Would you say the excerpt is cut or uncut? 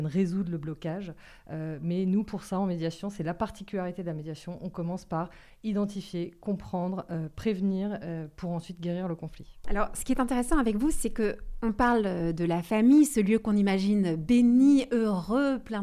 cut